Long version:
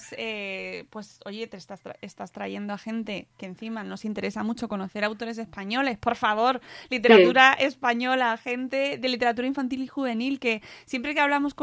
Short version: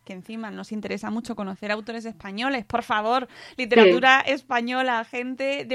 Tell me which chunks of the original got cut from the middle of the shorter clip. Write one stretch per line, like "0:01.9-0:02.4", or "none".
none